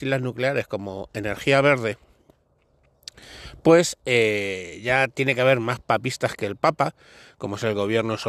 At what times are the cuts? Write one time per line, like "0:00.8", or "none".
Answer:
none